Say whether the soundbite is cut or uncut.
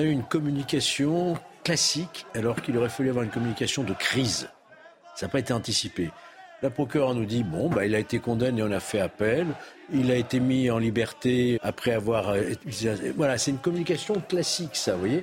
cut